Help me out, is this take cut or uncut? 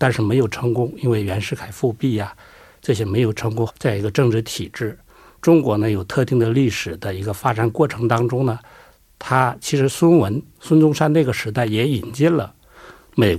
cut